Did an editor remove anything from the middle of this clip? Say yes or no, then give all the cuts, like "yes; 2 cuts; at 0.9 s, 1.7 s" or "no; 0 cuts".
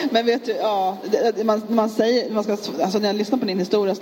no; 0 cuts